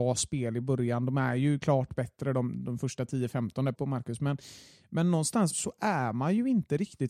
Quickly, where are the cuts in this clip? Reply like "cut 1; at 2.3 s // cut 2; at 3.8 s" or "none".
cut 1; at 3.7 s // cut 2; at 5.5 s